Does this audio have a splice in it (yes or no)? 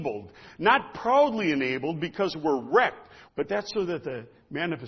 yes